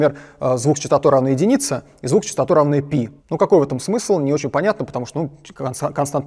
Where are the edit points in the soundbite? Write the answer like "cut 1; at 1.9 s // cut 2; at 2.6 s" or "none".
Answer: cut 1; at 3.2 s